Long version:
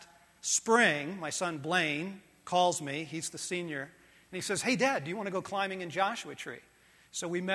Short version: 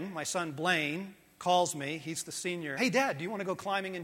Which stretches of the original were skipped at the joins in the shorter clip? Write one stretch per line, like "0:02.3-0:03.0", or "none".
0:03.8-0:04.6